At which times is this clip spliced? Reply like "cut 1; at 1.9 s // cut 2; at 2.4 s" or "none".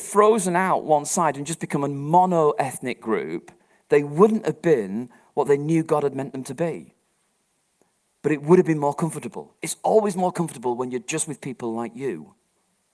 cut 1; at 9.6 s